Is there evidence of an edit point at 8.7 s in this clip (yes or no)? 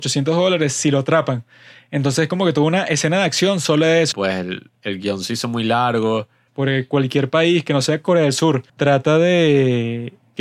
yes